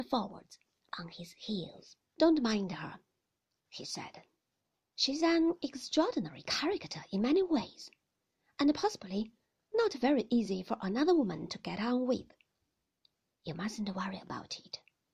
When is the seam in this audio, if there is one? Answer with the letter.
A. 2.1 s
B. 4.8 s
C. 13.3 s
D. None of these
A